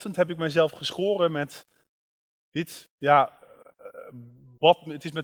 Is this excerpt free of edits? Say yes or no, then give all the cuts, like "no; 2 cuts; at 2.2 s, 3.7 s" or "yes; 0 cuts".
yes; 0 cuts